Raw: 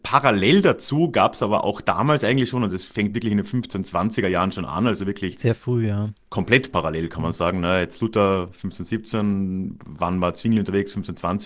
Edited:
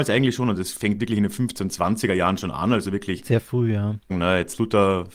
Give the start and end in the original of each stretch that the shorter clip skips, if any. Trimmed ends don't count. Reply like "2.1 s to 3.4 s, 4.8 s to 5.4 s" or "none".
6.2 s to 7.5 s